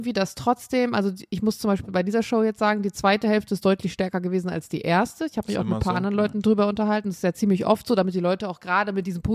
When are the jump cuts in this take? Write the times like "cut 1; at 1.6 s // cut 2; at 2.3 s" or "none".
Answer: none

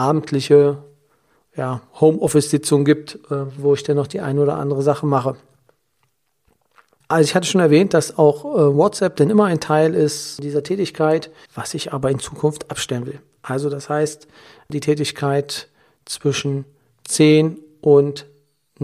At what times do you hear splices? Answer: cut 1; at 11.4 s

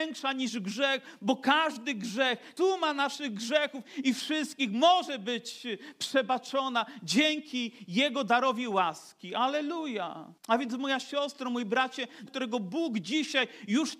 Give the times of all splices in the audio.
cut 1; at 2.6 s // cut 2; at 10.4 s // cut 3; at 12.3 s

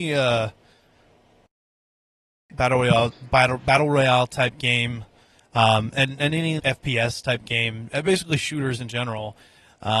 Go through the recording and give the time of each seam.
cut 1; at 6.6 s

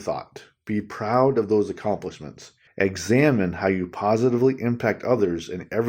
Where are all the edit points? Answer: cut 1; at 2.7 s

